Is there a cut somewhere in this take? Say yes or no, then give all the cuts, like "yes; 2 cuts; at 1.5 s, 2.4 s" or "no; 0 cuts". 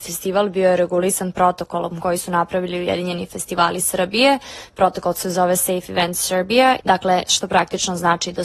yes; 1 cut; at 7.3 s